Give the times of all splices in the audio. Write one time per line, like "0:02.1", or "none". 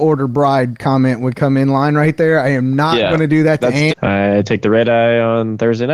0:03.9